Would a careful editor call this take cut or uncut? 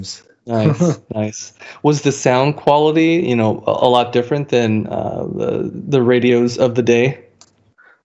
cut